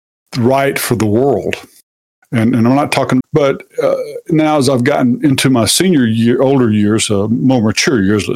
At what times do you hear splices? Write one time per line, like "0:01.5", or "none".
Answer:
0:03.2